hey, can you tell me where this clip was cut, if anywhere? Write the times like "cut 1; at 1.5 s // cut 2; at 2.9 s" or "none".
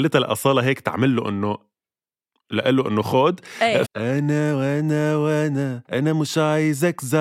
cut 1; at 3.8 s // cut 2; at 5.8 s